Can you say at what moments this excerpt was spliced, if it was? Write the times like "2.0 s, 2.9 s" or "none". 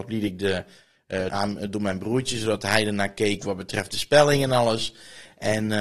1.3 s